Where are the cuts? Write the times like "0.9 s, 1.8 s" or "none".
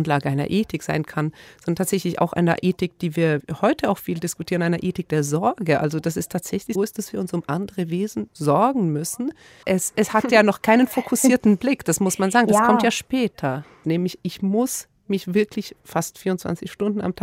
6.7 s, 9.6 s, 13.8 s